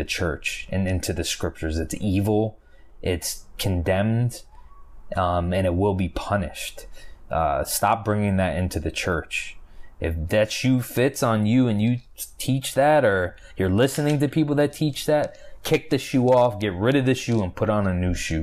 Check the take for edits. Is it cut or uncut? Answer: uncut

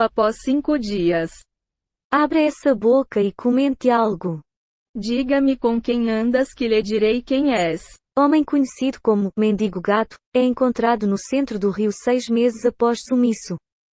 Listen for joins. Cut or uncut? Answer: cut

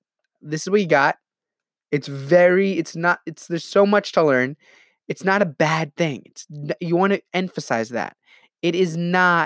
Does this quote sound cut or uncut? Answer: uncut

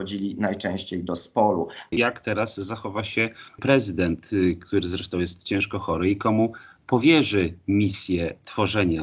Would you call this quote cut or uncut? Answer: cut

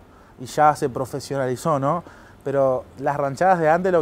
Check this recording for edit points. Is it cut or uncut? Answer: uncut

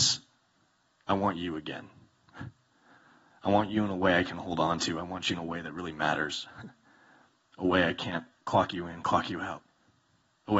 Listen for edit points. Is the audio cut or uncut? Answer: uncut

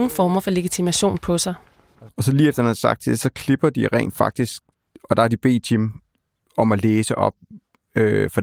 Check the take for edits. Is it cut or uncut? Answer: cut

